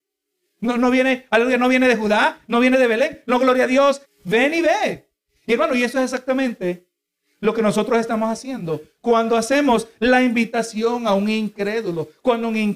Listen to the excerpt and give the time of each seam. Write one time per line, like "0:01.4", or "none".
0:04.0